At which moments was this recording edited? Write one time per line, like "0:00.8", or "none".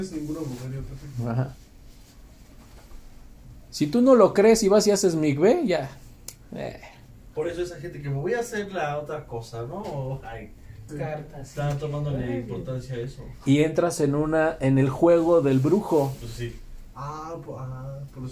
0:10.9

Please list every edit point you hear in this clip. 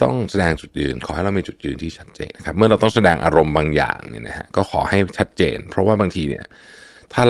0:02.3

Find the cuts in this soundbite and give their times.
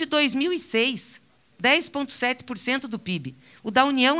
none

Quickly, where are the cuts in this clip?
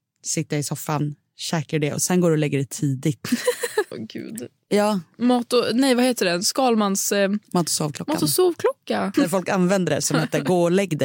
0:03.9
0:09.1

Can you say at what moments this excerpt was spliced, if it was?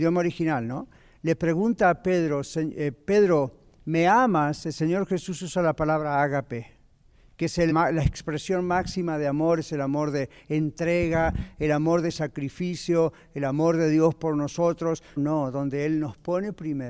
0:07.7
0:15.2

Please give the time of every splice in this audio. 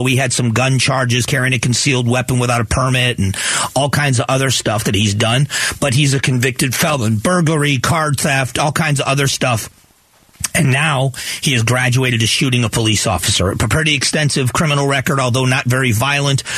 none

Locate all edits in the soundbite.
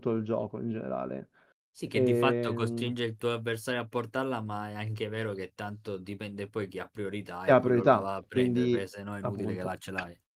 none

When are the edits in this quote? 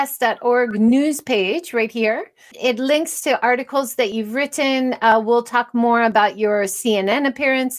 0:02.5

